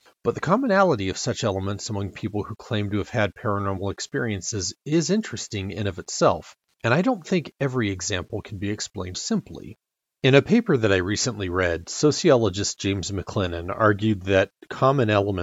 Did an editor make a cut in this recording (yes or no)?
yes